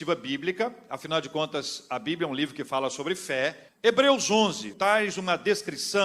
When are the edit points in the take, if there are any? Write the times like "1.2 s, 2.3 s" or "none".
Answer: 3.7 s, 4.7 s